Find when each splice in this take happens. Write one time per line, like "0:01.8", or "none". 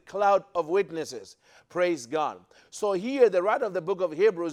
0:01.6